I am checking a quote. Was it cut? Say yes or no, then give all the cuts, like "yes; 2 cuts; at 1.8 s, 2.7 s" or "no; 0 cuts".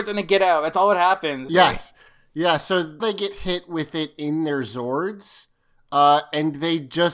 yes; 2 cuts; at 1.5 s, 3.0 s